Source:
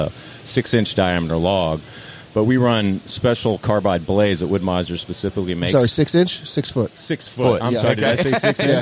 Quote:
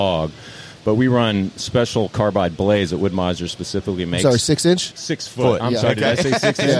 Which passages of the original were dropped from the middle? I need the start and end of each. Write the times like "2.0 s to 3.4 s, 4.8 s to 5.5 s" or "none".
6.4 s to 6.9 s